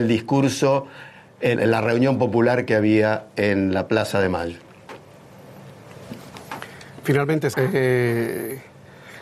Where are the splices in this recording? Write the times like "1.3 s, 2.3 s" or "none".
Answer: 1.5 s, 7.5 s